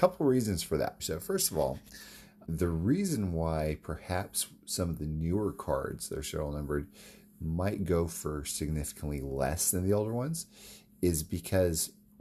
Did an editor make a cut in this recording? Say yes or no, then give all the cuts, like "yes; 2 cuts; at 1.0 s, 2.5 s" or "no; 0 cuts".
yes; 2 cuts; at 1.0 s, 2.4 s